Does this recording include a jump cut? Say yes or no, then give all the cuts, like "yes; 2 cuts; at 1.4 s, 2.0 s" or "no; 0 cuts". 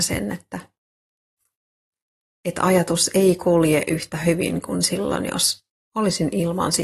no; 0 cuts